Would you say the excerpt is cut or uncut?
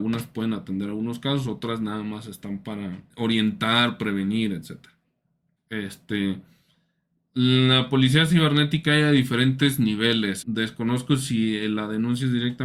cut